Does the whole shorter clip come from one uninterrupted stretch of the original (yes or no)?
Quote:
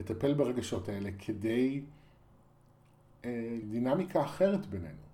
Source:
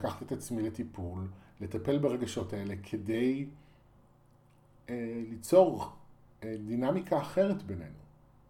no